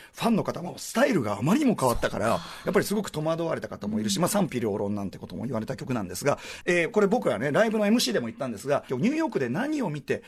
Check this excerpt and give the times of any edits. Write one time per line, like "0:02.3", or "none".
0:06.6
0:08.9